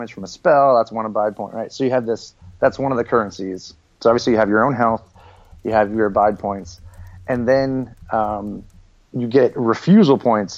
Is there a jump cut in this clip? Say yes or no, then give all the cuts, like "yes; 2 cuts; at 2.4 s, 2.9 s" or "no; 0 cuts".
no; 0 cuts